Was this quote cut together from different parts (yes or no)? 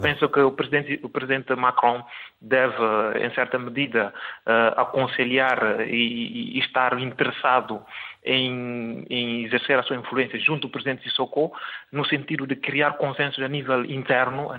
no